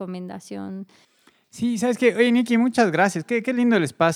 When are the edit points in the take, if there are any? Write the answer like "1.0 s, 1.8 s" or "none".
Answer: none